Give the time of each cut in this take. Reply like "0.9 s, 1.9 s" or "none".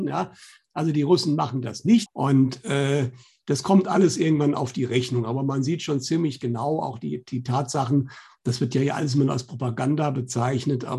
2.1 s